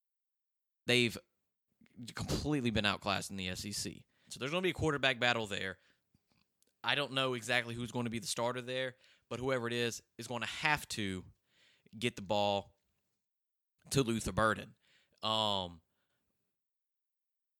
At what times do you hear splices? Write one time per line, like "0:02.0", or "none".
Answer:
0:04.3